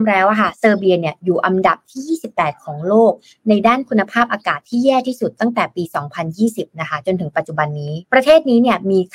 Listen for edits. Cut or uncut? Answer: cut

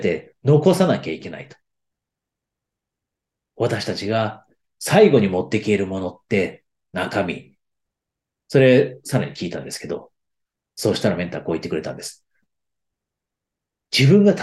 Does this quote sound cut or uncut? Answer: cut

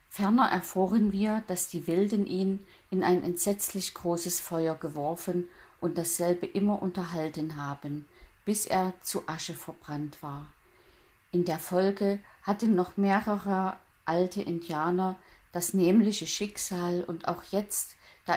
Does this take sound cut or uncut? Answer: uncut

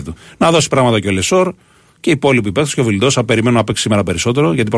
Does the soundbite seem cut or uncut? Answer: uncut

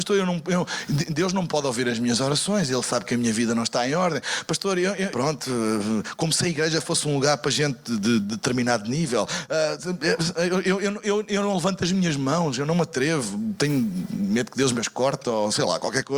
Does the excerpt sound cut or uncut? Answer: cut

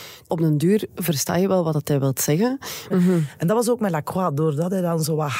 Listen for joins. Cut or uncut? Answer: cut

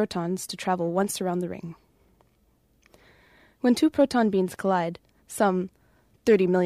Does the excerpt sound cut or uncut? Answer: uncut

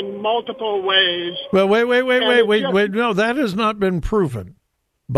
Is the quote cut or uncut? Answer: uncut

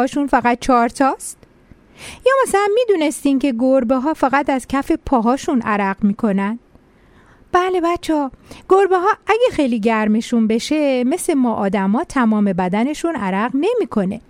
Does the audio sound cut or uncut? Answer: uncut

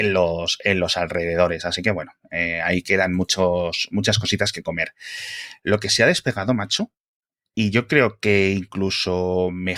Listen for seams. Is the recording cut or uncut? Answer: uncut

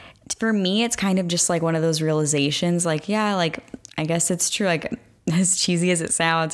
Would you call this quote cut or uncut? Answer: uncut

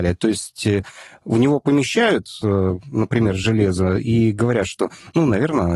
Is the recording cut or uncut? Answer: uncut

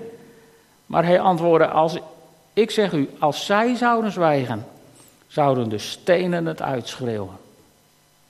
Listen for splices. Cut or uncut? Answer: uncut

